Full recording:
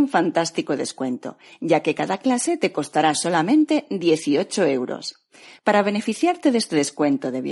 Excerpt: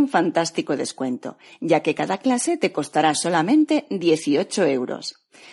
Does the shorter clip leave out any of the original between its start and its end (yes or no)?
no